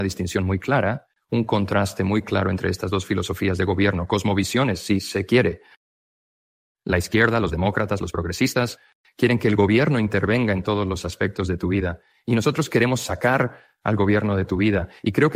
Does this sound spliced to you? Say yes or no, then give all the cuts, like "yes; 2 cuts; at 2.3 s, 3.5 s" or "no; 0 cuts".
no; 0 cuts